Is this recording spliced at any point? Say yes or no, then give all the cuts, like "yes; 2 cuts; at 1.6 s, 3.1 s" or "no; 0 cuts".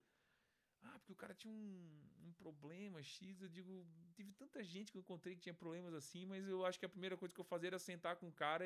yes; 1 cut; at 4.1 s